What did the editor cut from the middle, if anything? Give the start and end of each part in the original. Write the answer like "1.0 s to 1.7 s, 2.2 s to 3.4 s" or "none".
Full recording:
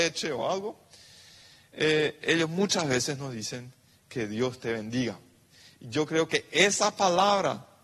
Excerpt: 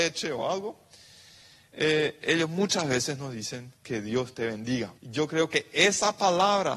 3.8 s to 4.0 s, 5.2 s to 5.8 s